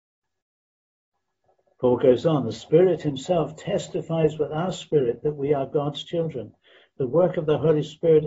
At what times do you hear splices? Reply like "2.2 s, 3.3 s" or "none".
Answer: none